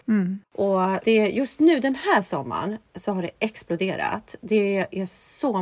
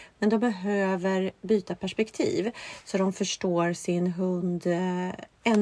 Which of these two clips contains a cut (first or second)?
first